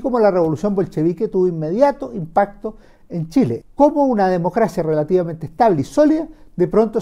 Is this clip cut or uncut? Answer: cut